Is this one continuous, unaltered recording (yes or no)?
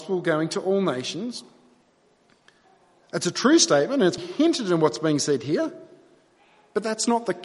no